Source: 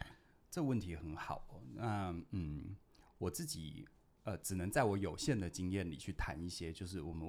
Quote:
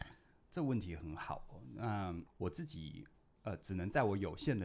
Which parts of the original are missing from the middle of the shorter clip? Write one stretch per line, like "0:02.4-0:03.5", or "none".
0:02.3-0:03.1